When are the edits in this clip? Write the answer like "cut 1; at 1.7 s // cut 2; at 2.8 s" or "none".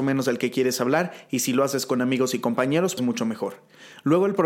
cut 1; at 3.0 s